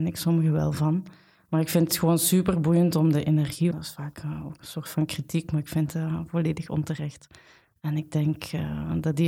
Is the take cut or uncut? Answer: cut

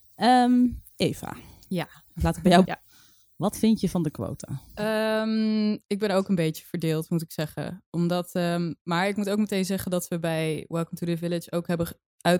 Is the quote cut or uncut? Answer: cut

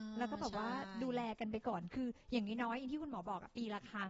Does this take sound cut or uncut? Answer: uncut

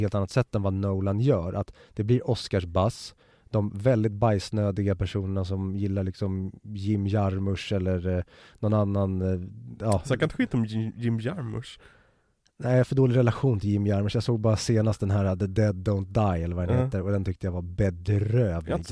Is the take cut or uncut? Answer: uncut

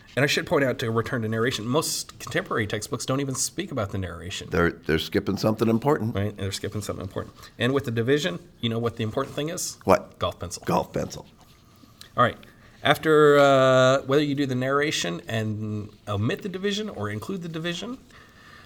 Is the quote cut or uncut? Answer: uncut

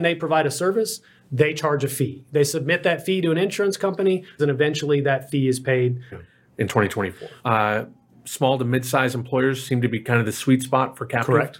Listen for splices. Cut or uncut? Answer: cut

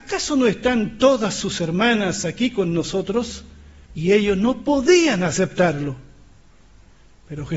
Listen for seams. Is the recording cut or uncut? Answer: cut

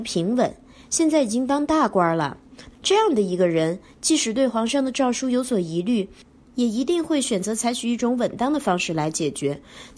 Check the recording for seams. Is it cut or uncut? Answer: cut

